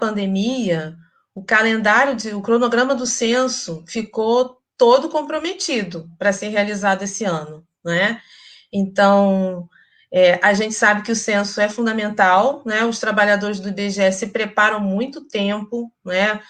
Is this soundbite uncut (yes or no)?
yes